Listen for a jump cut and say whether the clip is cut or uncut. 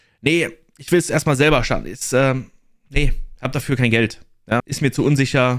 cut